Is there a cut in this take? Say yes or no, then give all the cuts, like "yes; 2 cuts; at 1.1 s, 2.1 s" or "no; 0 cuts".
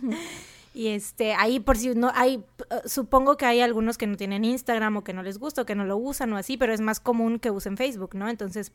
no; 0 cuts